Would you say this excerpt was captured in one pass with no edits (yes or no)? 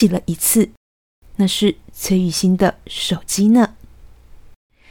yes